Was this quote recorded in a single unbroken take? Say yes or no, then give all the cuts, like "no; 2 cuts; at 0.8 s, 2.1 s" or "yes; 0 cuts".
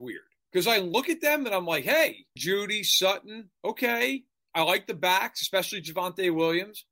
no; 1 cut; at 2.4 s